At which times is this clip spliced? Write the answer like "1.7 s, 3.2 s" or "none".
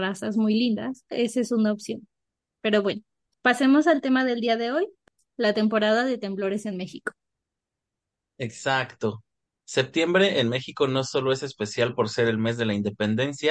1.1 s